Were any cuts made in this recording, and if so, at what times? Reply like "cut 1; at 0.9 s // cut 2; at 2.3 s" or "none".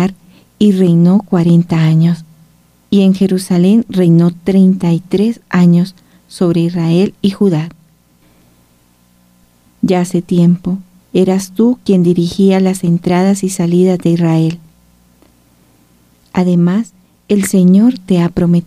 cut 1; at 2.8 s // cut 2; at 9.7 s // cut 3; at 11.0 s